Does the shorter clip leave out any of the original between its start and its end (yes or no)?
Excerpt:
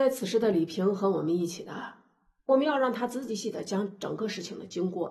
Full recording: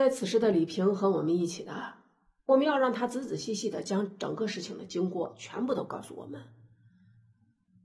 yes